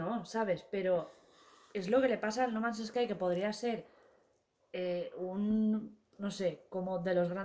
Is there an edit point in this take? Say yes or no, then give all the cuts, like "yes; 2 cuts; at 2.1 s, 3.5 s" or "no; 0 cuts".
no; 0 cuts